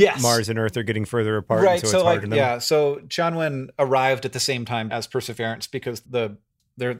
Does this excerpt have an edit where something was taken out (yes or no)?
yes